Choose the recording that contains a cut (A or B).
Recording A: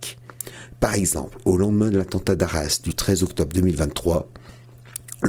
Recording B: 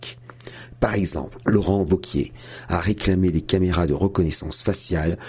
B